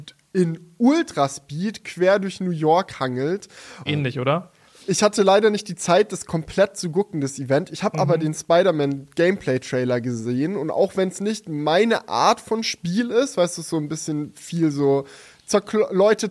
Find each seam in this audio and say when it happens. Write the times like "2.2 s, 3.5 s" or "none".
3.9 s

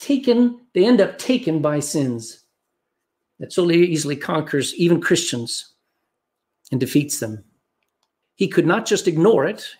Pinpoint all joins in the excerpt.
8.2 s

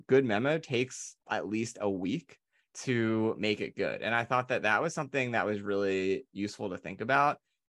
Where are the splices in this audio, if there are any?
1.2 s

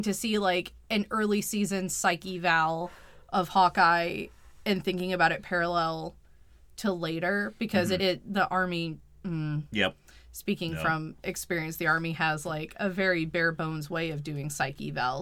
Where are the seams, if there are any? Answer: none

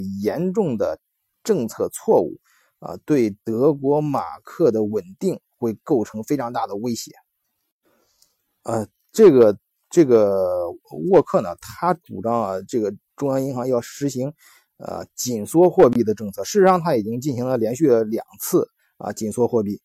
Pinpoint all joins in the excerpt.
none

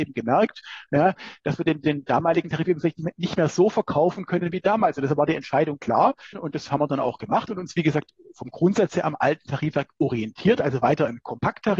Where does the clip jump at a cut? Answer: 6.3 s

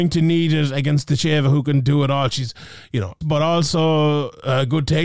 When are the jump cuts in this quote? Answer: 3.2 s

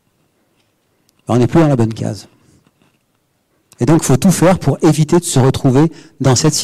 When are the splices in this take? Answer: none

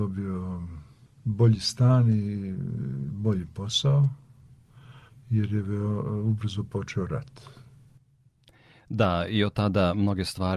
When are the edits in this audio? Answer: 5.1 s

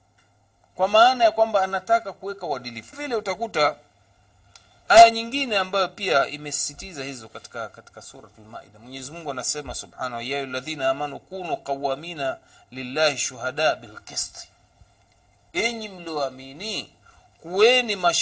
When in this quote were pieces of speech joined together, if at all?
2.9 s

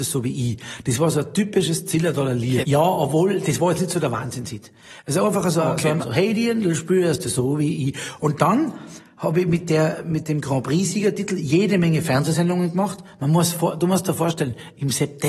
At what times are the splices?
2.6 s, 6.0 s

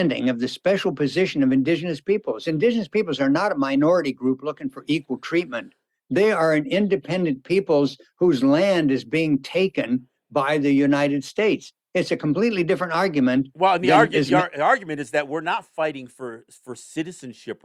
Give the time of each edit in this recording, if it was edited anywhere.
none

